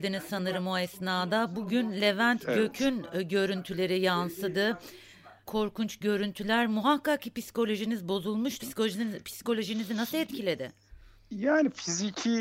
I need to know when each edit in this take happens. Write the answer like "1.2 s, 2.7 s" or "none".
5.5 s, 8.6 s